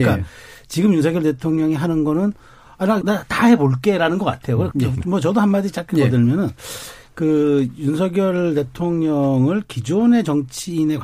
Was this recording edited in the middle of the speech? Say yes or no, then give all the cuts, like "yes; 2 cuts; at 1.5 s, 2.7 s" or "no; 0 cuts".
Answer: yes; 2 cuts; at 3.0 s, 4.7 s